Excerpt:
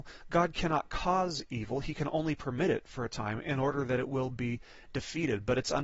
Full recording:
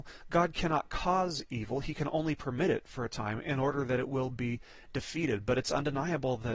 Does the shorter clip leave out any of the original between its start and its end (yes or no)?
no